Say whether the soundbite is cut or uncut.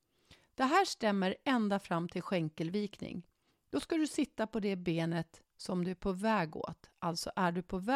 cut